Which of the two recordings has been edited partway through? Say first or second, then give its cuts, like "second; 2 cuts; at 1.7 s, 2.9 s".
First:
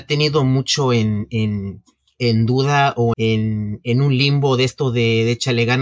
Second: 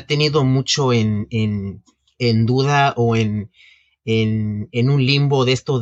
first; 1 cut; at 3.1 s